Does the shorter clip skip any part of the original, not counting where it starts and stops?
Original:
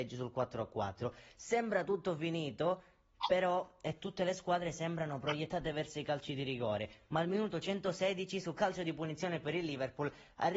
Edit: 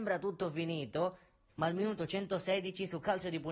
yes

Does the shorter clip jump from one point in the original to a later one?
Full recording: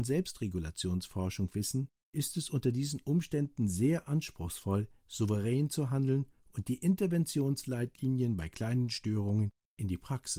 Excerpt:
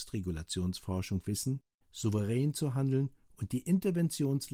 yes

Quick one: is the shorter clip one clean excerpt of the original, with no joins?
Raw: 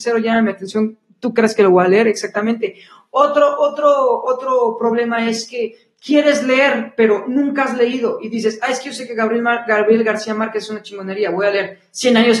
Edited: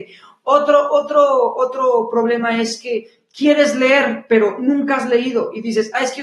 yes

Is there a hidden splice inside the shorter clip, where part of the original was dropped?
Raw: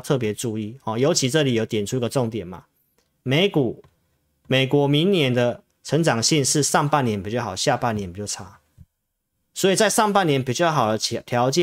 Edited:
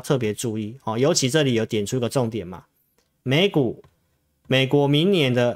no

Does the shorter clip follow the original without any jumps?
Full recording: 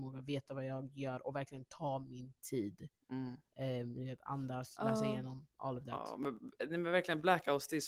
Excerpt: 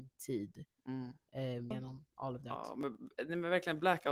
no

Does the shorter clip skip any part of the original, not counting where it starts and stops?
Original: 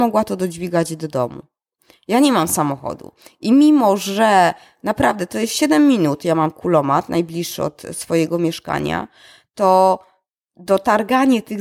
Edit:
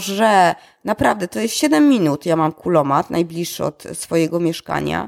no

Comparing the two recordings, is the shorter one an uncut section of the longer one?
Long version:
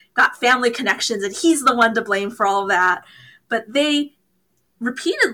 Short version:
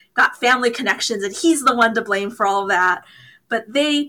yes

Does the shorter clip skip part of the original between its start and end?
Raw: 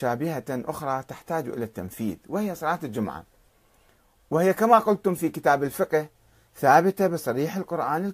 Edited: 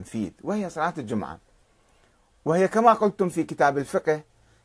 no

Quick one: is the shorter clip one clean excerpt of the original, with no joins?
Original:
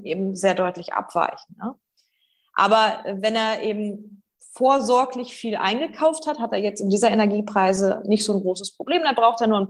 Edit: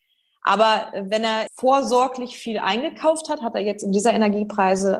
no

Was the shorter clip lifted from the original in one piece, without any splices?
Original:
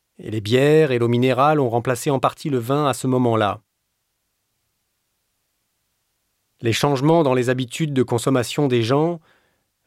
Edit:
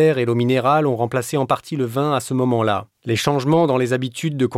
no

